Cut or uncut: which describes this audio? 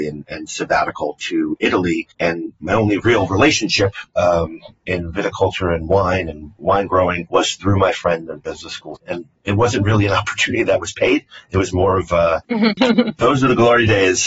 cut